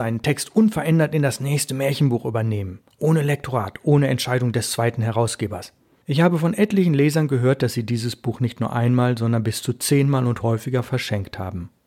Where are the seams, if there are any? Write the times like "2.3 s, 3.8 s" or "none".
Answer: 6.0 s

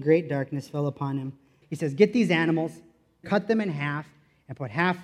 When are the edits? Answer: 1.6 s, 3.2 s

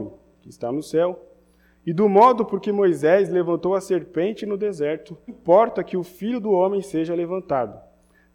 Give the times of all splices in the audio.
5.3 s

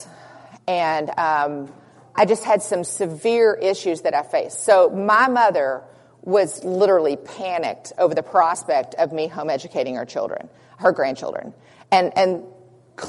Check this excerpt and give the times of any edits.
2.1 s, 6.6 s

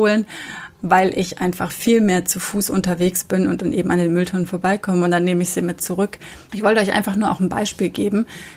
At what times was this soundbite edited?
6.5 s

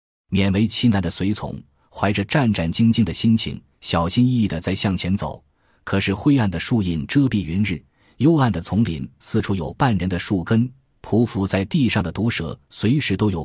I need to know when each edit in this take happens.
none

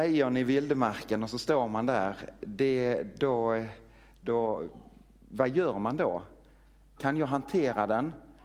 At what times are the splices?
7.0 s

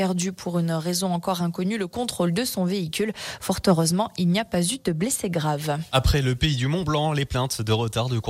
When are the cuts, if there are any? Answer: none

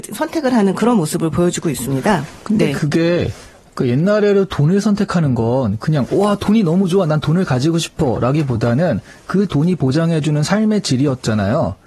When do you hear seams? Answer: none

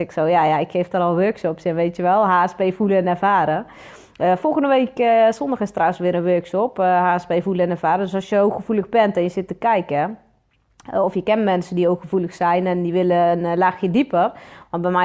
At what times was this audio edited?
none

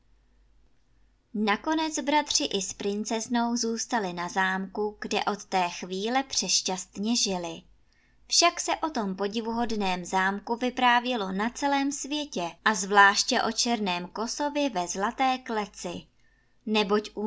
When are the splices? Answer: 12.6 s

